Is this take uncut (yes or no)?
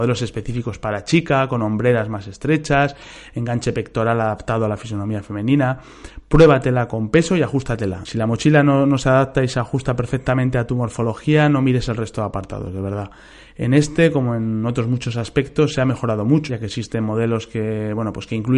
no